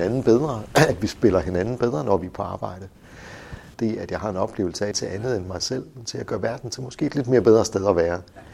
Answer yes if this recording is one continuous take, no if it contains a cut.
no